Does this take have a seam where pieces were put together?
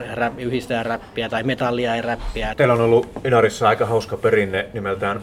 yes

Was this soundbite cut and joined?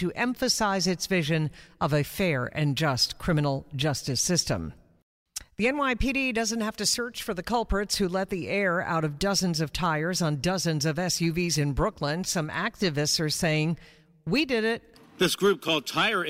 no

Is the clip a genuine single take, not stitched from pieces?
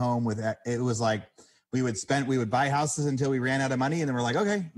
yes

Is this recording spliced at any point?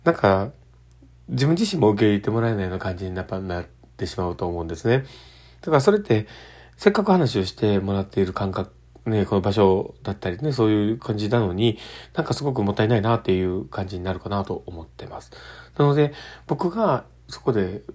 no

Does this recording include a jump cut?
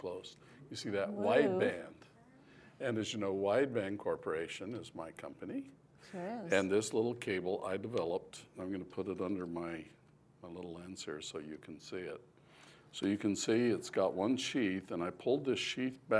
no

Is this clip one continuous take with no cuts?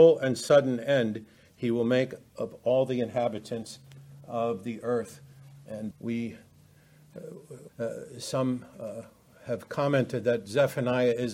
no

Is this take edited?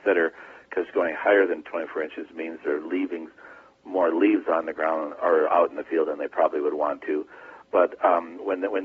no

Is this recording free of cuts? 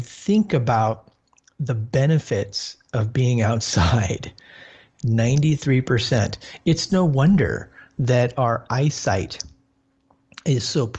yes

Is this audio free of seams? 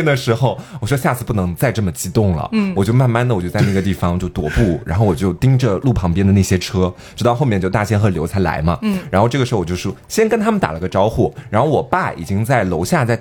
yes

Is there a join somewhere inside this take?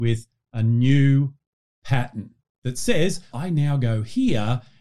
yes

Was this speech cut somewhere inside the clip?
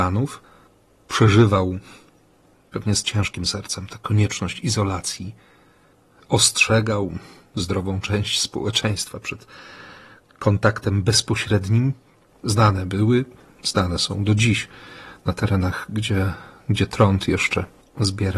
yes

